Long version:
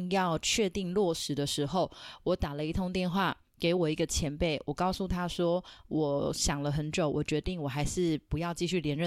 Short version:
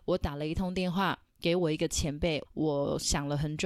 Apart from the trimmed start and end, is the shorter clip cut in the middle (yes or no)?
yes